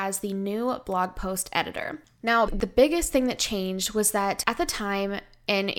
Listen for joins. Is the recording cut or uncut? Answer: cut